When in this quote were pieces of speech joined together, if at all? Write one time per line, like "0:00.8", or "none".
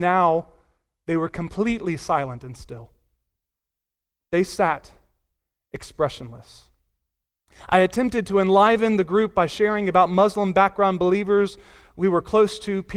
none